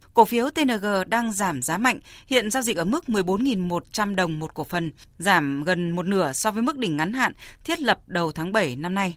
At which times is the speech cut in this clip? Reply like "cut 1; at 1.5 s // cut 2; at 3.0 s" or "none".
none